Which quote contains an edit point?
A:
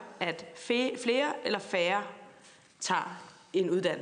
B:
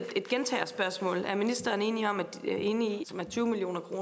B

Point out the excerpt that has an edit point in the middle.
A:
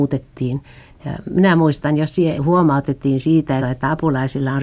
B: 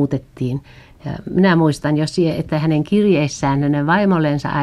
A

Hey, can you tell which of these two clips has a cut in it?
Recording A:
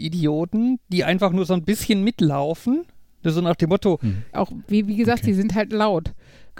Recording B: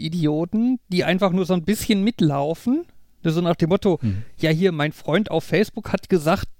A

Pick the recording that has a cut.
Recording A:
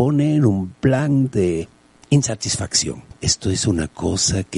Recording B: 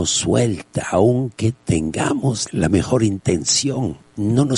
A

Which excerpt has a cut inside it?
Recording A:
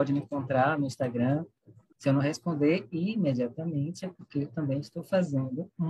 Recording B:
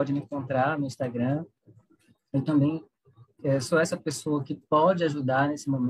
A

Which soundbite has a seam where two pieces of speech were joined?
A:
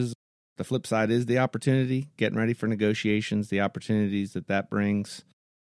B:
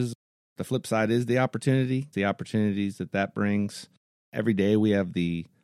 B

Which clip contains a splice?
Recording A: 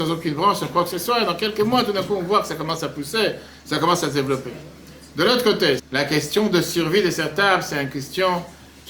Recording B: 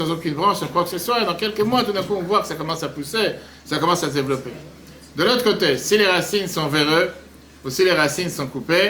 A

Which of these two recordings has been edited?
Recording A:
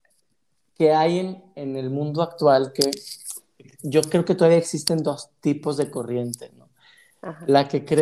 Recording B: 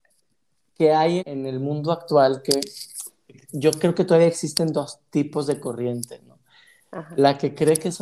B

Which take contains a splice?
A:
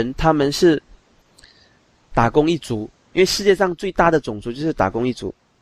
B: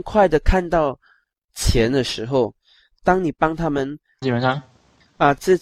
B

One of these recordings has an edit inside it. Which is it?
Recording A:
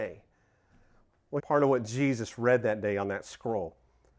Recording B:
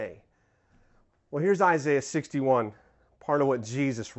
A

